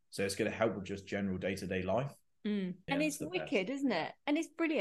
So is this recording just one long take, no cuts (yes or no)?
no